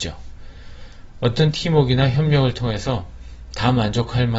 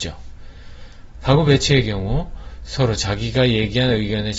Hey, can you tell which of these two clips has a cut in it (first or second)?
second